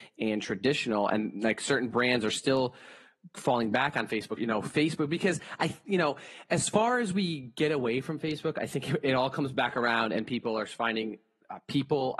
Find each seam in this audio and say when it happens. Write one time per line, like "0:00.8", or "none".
0:04.4